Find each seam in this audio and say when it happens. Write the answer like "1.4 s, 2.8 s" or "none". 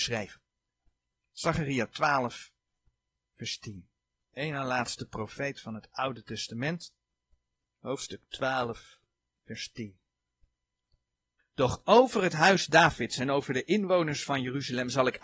none